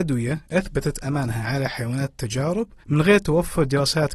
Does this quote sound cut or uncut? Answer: cut